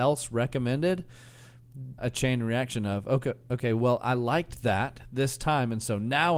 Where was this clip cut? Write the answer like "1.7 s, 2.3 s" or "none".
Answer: 2.0 s